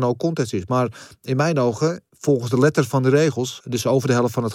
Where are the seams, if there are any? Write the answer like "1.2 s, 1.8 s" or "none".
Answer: 2.1 s, 3.6 s